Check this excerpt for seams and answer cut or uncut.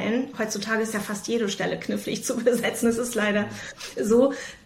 uncut